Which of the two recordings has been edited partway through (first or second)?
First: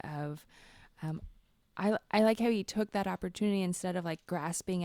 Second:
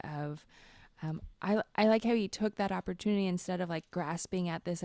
second